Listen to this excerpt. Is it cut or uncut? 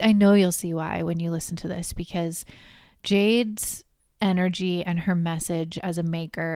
uncut